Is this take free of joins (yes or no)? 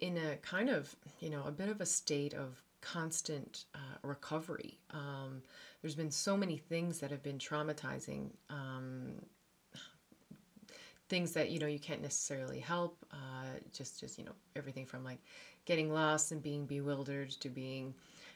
yes